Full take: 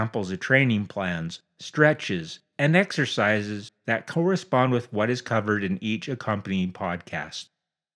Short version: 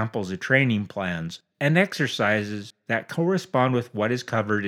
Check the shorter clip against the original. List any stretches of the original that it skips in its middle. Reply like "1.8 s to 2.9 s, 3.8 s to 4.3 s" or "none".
1.5 s to 2.5 s